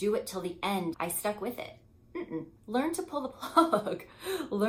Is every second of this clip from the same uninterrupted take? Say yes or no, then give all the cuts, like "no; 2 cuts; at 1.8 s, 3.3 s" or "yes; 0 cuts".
no; 2 cuts; at 0.9 s, 2.6 s